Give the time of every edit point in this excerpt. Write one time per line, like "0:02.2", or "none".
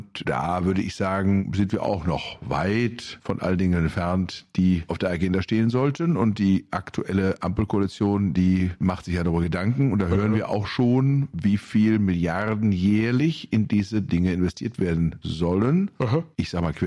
none